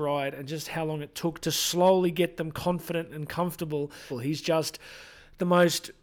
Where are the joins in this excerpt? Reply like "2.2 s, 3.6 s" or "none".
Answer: 1.4 s, 4.1 s

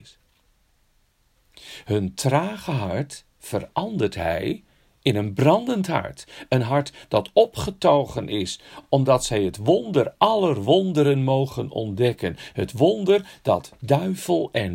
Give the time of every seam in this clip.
none

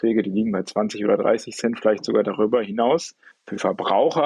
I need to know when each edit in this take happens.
3.3 s

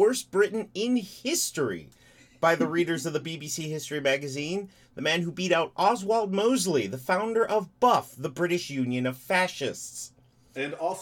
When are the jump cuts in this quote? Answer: none

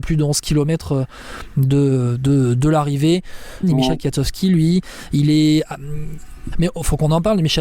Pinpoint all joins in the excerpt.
3.6 s, 6.5 s

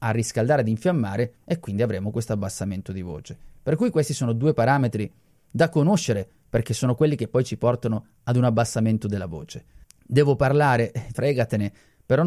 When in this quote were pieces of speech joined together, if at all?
9.8 s, 11.1 s

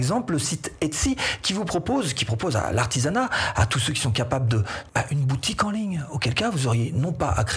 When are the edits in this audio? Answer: 4.9 s

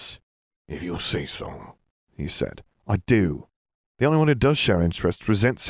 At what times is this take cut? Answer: 3.9 s

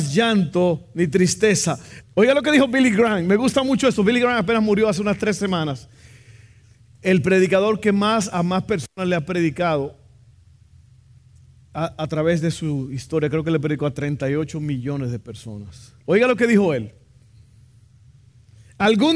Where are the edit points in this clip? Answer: 2.0 s, 16.0 s

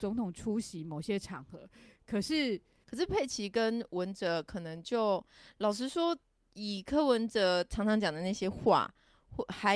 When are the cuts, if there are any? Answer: 2.8 s

